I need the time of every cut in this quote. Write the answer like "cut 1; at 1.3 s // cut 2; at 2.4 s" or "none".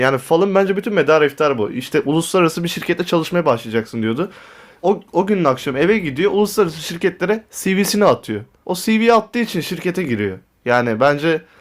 cut 1; at 4.8 s // cut 2; at 8.6 s